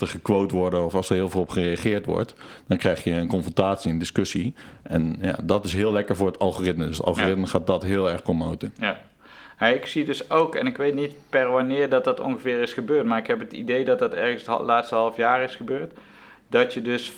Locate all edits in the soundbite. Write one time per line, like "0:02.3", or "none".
none

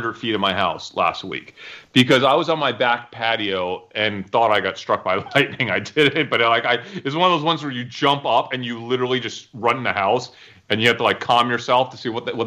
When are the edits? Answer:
none

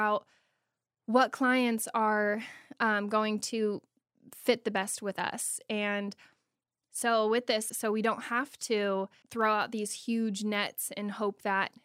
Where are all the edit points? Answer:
0:07.7
0:09.2

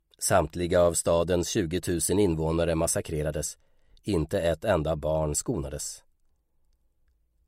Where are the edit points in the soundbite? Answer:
none

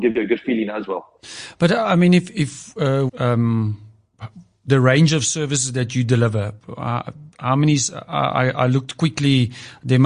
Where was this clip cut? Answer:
0:03.1

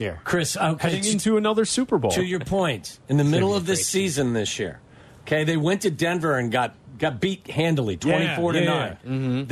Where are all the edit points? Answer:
none

